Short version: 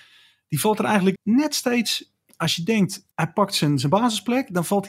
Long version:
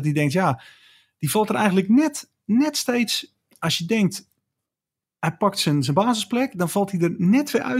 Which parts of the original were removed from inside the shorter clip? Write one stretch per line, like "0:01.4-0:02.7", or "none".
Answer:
0:01.9-0:02.4
0:04.3-0:05.2